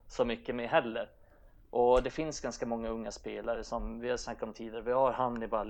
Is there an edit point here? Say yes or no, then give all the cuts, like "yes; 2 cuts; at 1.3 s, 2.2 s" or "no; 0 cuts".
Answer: no; 0 cuts